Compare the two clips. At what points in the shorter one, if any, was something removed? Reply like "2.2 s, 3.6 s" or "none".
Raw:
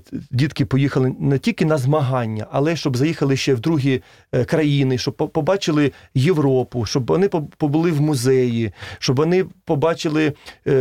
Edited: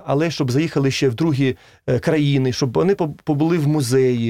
2.5 s

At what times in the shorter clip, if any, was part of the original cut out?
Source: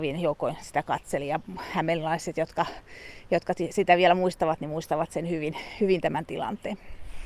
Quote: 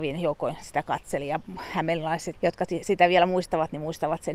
2.3 s

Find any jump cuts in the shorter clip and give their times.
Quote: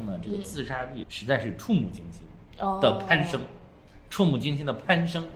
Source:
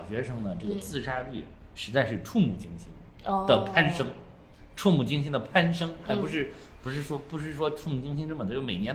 1.0 s

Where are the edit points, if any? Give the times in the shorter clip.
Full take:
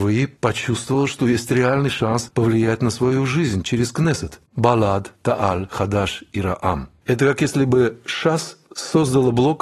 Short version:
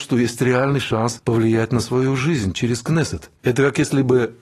3.4 s

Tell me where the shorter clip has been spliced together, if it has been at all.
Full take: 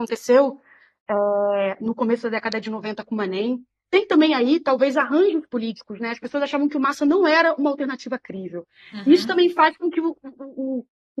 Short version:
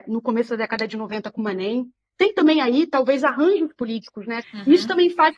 4.4 s

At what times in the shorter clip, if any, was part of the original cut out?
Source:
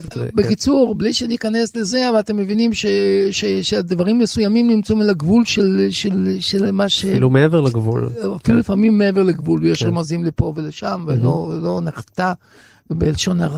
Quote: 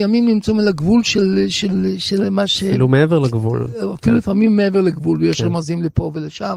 none

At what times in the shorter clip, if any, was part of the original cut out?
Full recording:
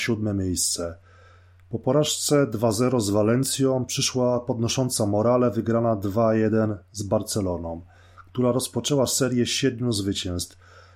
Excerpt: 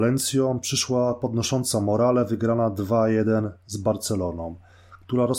none

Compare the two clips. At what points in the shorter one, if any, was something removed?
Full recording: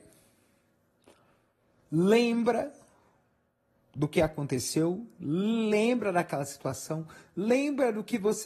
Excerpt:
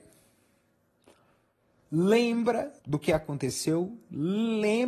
2.8 s

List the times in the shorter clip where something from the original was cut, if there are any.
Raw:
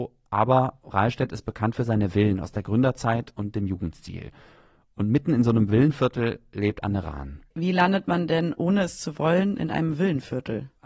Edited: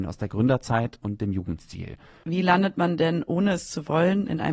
2.2 s

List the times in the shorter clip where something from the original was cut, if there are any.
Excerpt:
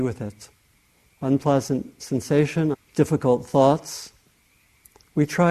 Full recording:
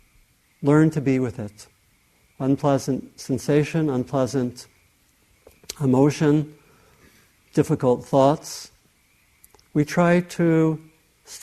2.7 s

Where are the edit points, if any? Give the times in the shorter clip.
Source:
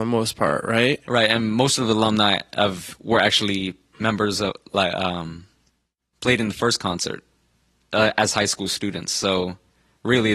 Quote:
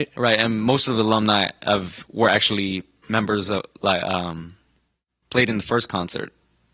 none

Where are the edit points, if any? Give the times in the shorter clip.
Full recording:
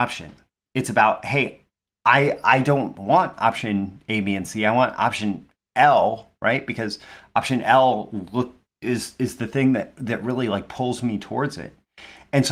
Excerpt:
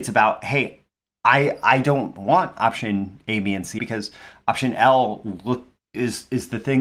3.8 s

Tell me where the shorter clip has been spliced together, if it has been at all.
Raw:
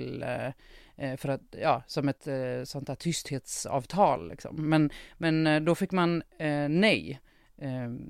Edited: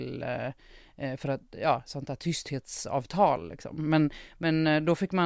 1.9 s

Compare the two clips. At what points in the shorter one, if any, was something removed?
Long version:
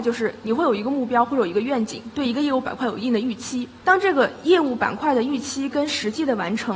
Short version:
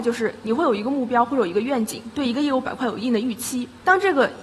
none

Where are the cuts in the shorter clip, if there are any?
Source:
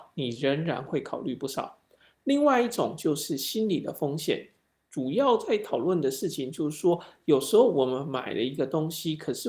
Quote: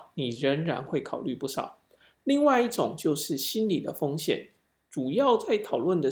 none

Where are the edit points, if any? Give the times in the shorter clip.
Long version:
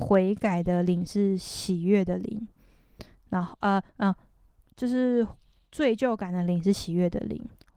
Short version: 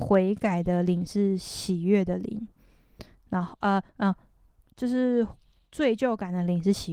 none

